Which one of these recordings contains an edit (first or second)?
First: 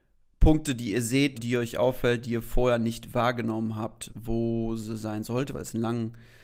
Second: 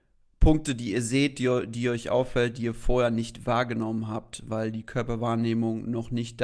first